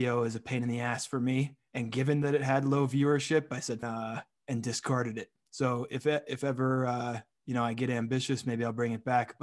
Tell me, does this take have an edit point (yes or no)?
yes